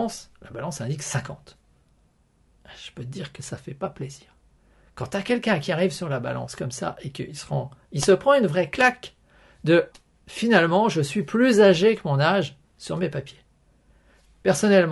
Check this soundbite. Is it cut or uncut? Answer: cut